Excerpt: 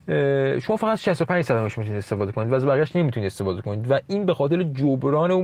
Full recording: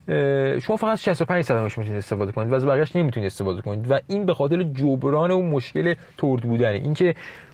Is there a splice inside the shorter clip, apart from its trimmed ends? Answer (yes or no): no